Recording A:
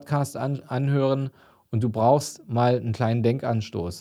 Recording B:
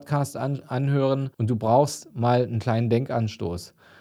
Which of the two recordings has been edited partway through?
B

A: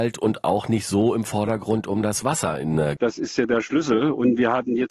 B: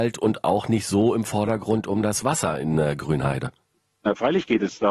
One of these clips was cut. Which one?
A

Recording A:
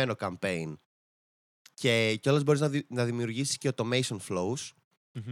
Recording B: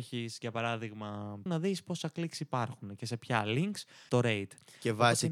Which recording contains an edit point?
B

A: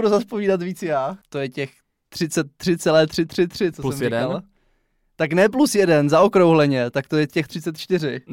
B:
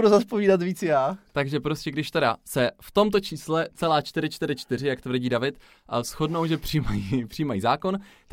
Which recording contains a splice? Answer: A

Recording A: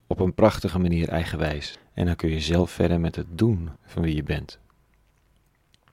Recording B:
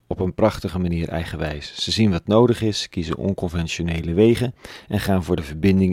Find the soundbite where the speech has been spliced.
A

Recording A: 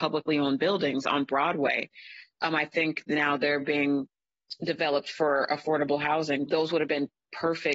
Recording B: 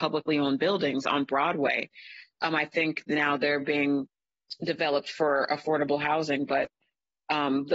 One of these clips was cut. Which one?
A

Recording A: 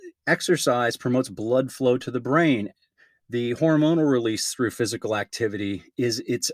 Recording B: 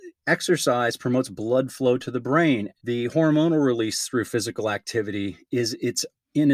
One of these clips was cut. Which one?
B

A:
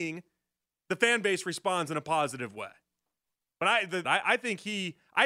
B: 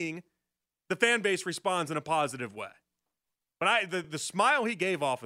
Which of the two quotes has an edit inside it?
A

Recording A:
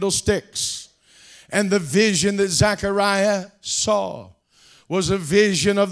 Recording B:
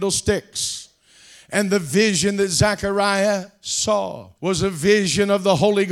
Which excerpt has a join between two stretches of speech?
B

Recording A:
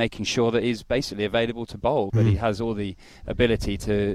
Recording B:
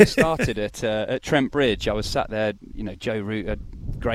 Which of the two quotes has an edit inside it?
A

